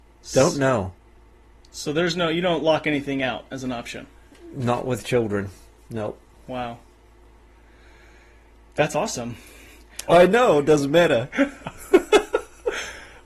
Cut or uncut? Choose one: cut